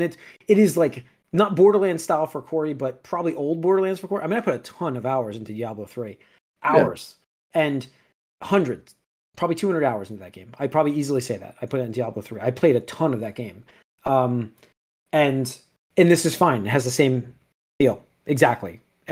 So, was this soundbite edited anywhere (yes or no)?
no